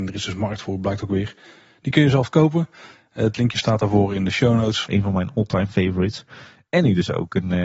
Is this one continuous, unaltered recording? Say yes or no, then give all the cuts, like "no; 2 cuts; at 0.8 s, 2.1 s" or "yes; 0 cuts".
no; 1 cut; at 4.9 s